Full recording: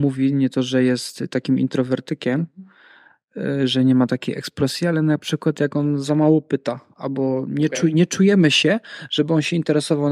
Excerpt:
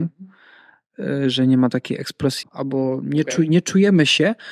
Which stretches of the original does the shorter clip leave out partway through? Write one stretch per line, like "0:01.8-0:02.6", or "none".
0:04.8-0:06.9